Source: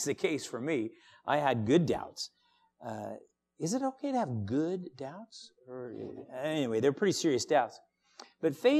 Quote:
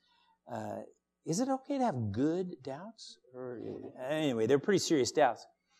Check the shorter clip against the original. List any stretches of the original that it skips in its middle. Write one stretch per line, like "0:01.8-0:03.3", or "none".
none